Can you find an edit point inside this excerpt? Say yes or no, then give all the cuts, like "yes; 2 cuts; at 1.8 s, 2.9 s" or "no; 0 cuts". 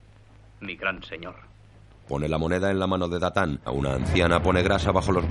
yes; 2 cuts; at 2.0 s, 3.7 s